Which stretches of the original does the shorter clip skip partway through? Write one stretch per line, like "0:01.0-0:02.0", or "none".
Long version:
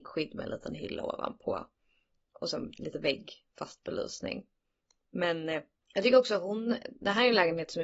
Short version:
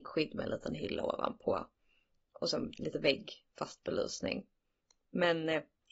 none